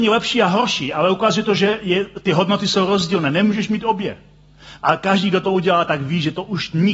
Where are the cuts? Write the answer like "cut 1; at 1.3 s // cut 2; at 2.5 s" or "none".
cut 1; at 4.8 s